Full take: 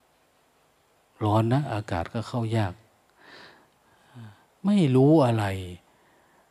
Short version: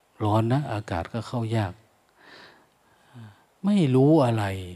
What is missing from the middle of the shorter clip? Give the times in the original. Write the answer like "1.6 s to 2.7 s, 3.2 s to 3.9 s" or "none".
none

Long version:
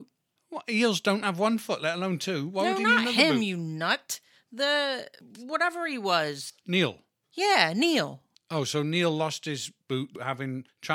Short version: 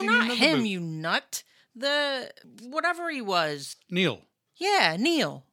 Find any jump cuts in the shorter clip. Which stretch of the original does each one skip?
none

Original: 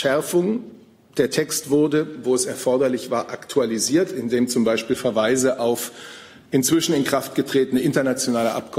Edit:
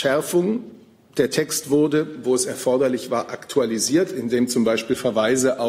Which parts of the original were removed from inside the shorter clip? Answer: none

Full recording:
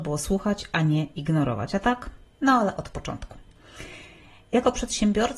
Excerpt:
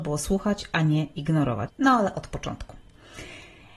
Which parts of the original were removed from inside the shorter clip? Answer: 1.7 s to 2.3 s

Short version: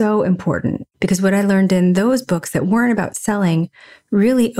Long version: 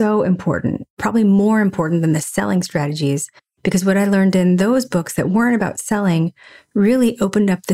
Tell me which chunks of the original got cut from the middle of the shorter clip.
0.9 s to 3.5 s

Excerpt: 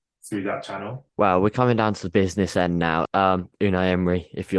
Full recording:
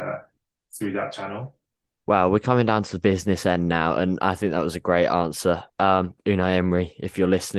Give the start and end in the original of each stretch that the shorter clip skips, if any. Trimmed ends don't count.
1.6 s to 2.0 s, 3.9 s to 5.7 s

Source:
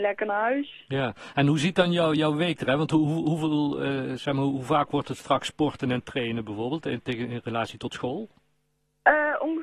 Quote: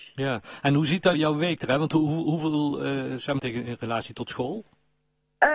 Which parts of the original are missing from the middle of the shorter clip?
1.9 s to 2.1 s, 4.4 s to 7.0 s

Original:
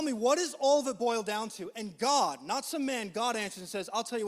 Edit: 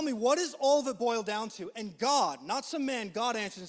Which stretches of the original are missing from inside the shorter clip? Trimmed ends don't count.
none

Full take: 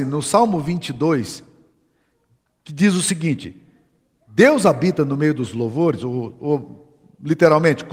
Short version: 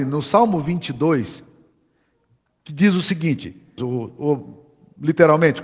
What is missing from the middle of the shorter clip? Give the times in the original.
3.8 s to 6.0 s

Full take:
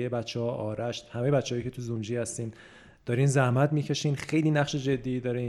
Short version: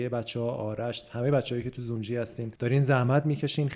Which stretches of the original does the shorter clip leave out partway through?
2.6 s to 3.0 s

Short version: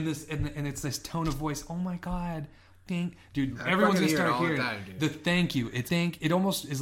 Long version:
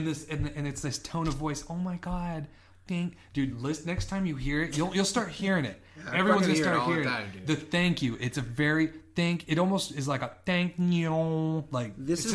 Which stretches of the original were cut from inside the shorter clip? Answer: 3.5 s to 6.0 s, 8.3 s to 9.1 s

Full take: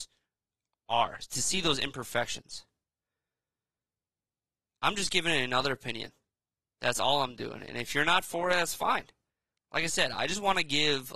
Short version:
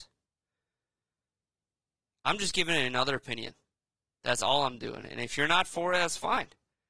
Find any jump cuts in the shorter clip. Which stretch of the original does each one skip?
none

